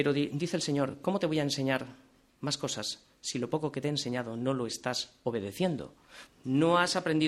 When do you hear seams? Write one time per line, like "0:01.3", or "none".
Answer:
0:06.3